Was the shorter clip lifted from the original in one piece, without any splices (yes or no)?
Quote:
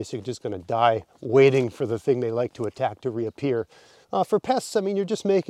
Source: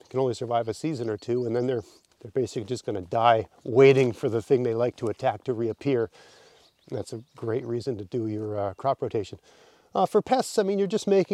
no